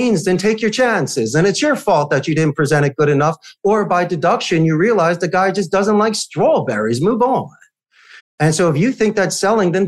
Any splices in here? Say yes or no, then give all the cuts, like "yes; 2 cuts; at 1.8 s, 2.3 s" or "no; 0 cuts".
yes; 1 cut; at 8.2 s